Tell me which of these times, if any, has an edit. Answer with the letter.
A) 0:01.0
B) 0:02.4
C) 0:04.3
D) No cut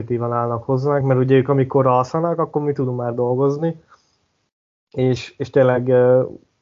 D